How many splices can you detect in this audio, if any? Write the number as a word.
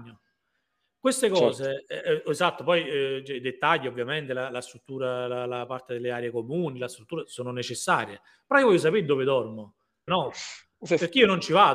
one